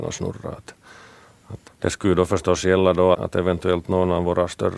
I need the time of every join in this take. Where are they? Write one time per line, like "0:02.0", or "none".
0:01.7
0:03.1

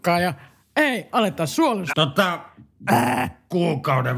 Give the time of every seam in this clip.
0:01.9

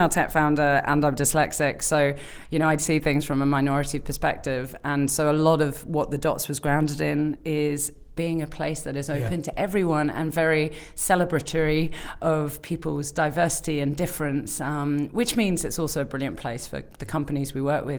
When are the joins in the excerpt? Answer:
0:02.8

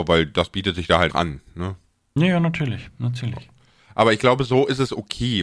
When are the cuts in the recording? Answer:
0:01.1

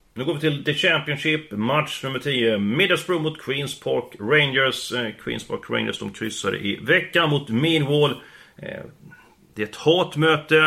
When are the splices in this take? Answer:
none

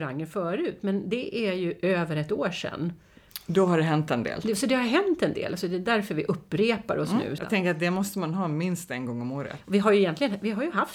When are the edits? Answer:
0:07.4
0:09.6

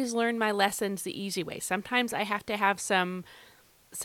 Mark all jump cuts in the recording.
none

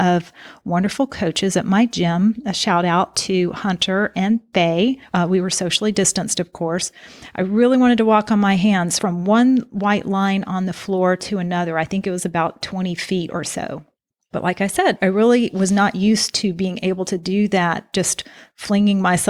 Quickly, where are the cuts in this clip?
none

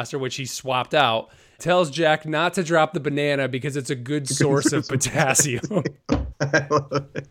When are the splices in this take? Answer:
0:01.6
0:06.3

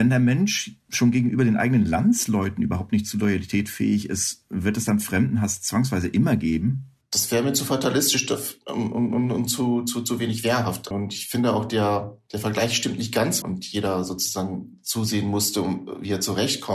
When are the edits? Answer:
0:10.9
0:13.4

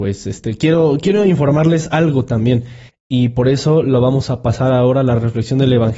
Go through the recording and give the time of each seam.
0:02.9

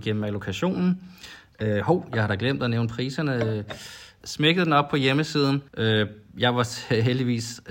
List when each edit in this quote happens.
0:01.5
0:04.2
0:05.7

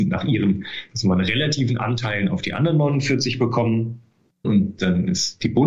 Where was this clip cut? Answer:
0:04.4

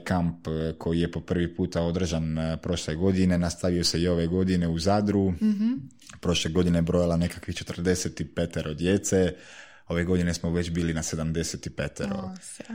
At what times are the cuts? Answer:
none

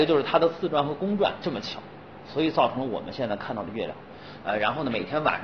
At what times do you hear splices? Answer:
0:04.4

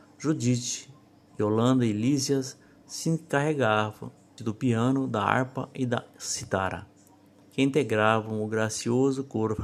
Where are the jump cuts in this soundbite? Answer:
0:04.4
0:07.4

